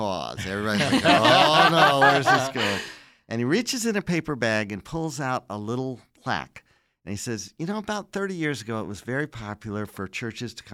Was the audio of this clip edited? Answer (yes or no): no